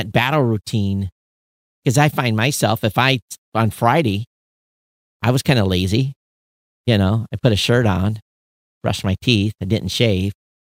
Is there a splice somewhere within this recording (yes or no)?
yes